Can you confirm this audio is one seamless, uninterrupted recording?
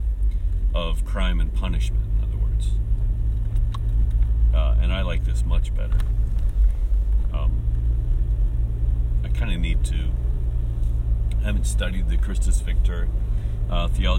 yes; 0 cuts

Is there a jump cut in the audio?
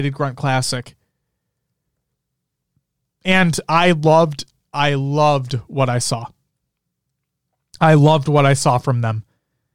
no; 0 cuts

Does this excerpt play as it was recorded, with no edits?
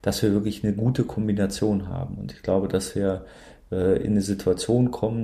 yes; 0 cuts

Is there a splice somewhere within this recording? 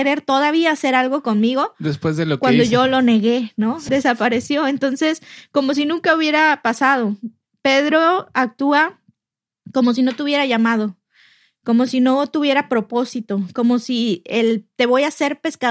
yes; 1 cut; at 3.9 s

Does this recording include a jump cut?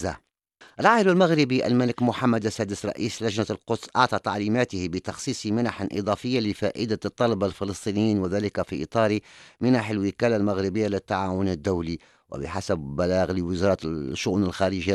no; 0 cuts

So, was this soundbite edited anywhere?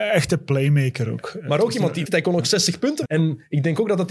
yes; 2 cuts; at 2.0 s, 3.0 s

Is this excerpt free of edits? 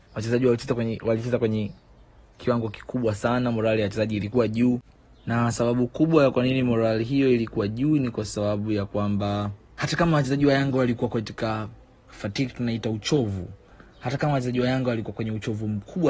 no; 2 cuts; at 9.6 s, 12.1 s

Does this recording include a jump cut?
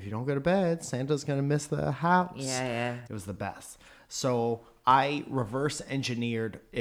yes; 1 cut; at 3.1 s

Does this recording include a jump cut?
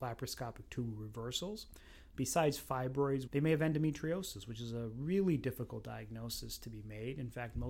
yes; 2 cuts; at 2.1 s, 3.3 s

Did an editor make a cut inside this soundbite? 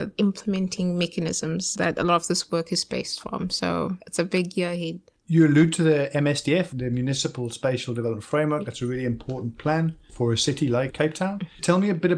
no; 0 cuts

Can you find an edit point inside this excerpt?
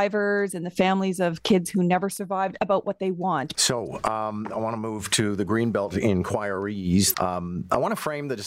yes; 2 cuts; at 3.5 s, 7.1 s

